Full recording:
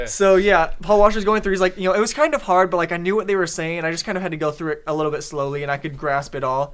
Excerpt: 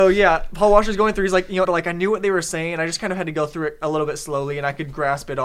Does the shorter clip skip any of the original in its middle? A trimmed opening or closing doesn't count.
yes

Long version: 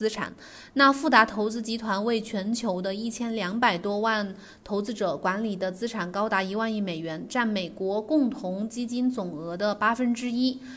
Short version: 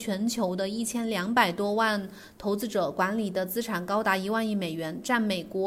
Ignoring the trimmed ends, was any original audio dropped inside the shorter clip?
no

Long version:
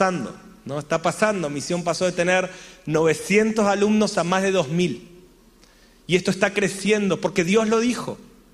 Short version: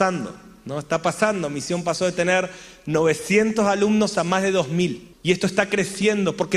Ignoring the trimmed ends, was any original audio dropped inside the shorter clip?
yes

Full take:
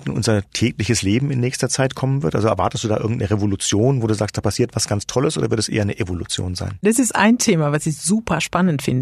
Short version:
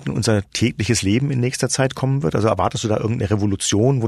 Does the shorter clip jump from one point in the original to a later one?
no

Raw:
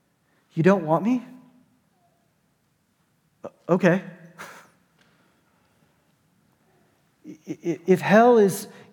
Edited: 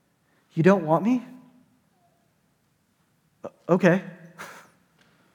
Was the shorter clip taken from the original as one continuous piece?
yes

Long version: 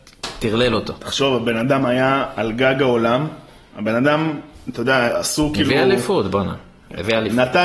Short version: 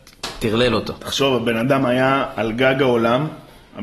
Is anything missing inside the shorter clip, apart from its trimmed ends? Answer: no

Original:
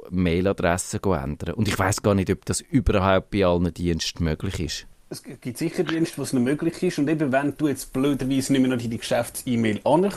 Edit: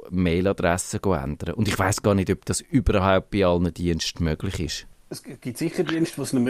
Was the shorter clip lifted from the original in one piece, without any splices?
yes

